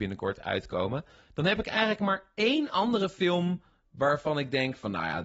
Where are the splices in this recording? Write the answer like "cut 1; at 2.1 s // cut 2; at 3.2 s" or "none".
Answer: none